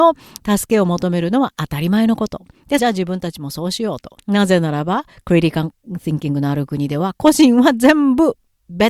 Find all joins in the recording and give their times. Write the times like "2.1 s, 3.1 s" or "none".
2.8 s, 4.2 s

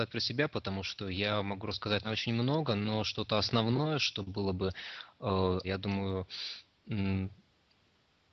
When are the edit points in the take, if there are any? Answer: 2.0 s, 5.6 s

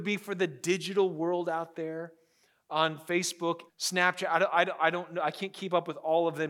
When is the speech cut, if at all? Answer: 3.7 s

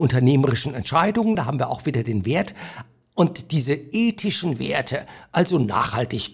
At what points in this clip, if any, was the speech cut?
1.4 s

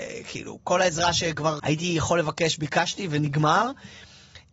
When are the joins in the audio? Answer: 1.6 s

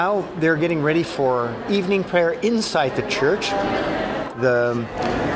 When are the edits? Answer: 4.3 s

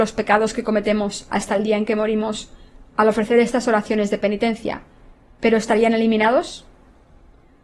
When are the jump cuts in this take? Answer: none

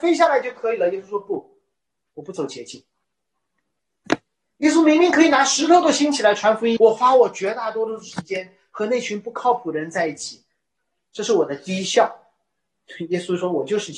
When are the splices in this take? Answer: 6.8 s

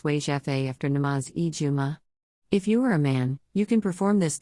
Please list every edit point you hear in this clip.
none

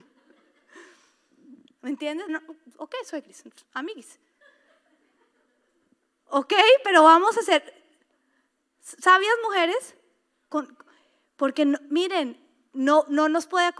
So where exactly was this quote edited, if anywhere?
2.3 s

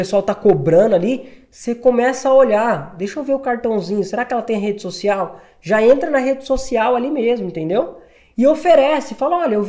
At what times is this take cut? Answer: none

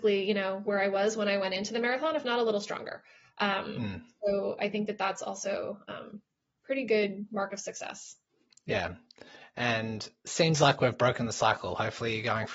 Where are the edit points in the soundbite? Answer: none

